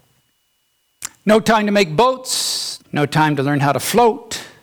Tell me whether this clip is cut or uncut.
cut